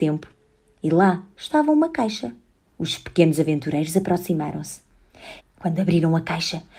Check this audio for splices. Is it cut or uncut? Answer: cut